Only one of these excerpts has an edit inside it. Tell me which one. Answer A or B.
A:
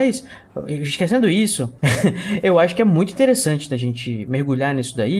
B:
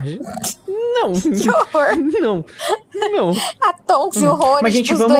A